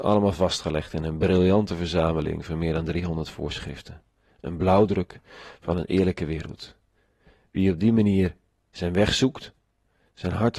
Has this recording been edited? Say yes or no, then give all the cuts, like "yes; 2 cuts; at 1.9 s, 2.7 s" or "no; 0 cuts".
no; 0 cuts